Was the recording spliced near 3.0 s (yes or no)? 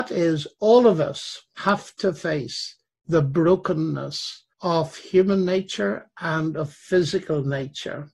no